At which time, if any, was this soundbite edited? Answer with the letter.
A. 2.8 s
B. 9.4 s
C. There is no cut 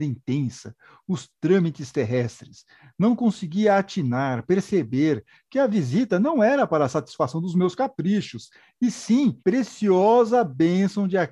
B